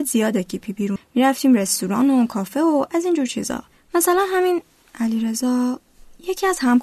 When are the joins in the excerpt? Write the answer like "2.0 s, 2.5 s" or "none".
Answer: 1.0 s